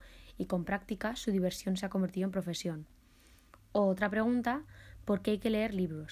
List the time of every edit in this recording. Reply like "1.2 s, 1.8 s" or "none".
none